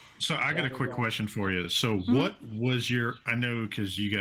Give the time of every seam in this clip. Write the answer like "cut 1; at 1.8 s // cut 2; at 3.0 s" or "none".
none